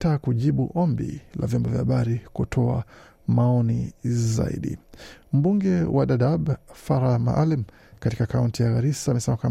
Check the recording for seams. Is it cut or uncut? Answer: uncut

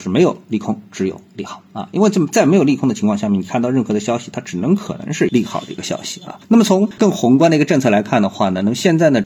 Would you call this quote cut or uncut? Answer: uncut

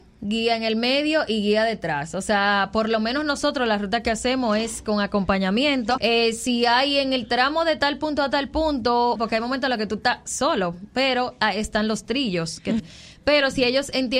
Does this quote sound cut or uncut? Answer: cut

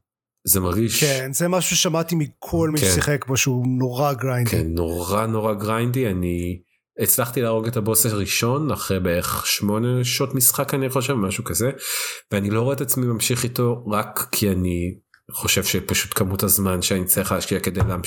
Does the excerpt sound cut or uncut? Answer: uncut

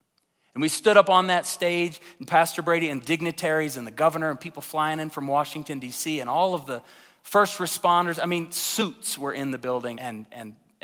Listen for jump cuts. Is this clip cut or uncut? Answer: cut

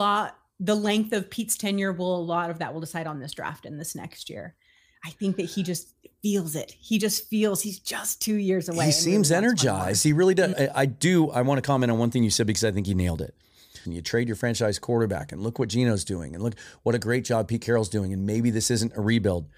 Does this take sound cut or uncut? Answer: cut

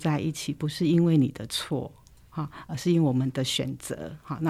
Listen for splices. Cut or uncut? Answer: uncut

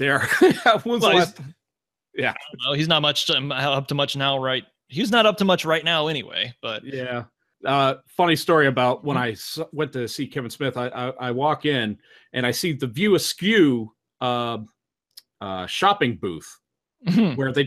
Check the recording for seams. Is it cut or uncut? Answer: uncut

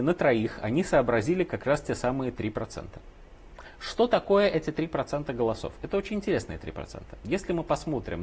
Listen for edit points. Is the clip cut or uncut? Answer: uncut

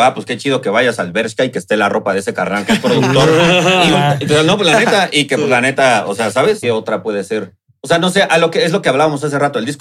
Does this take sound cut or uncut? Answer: cut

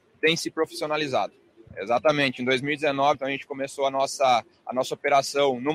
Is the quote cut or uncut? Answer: cut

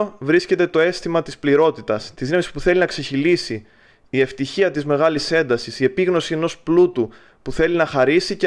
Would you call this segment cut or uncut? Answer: cut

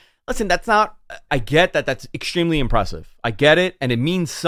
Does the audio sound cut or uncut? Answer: cut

